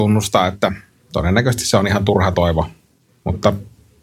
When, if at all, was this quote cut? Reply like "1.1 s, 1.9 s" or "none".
none